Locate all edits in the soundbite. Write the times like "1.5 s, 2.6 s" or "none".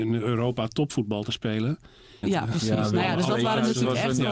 2.2 s